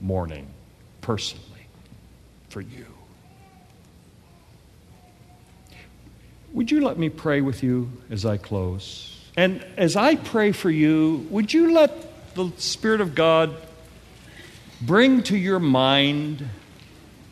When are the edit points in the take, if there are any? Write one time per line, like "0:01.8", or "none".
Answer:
none